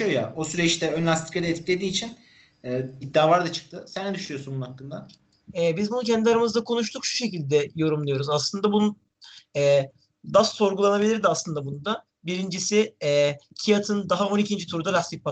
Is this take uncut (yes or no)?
no